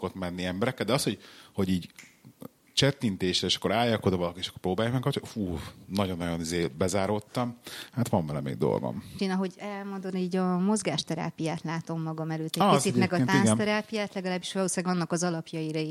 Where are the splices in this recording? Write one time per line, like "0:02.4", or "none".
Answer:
0:09.2